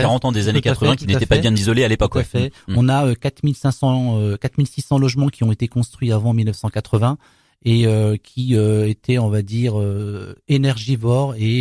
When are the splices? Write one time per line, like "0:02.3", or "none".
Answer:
none

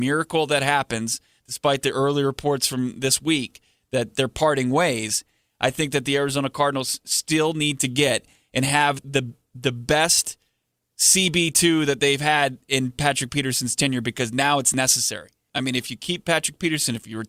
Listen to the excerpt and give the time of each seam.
0:15.5

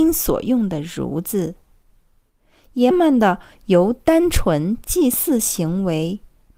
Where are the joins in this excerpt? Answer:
0:02.9

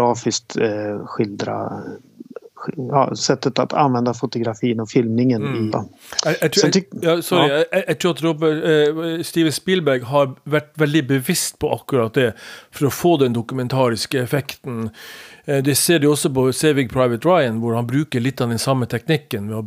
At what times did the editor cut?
0:05.7

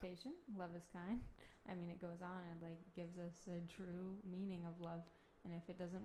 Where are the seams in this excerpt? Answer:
none

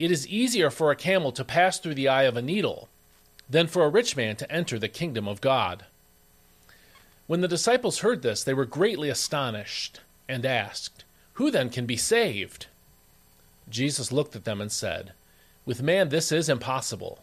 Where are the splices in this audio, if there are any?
none

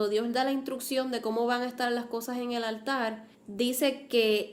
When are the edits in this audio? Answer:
0:03.3

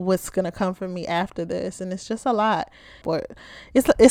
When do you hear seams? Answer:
0:03.0

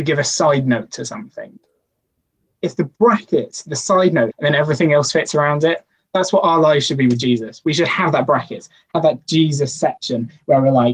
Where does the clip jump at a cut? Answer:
0:04.3

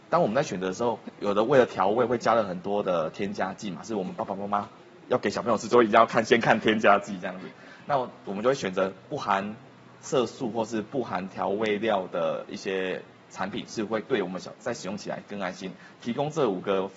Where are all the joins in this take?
none

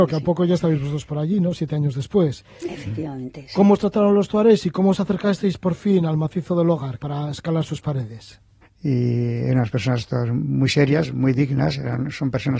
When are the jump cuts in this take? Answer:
0:07.0
0:08.6
0:11.1

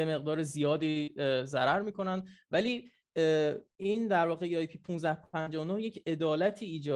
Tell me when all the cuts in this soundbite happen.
0:03.7

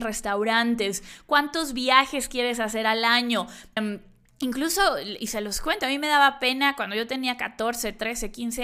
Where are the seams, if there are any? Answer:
0:03.8

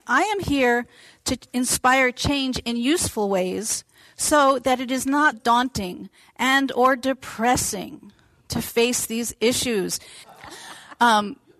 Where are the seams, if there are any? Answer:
0:05.3
0:10.2

